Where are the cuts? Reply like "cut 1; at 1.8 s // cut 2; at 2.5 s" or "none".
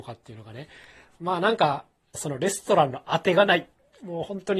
cut 1; at 2.1 s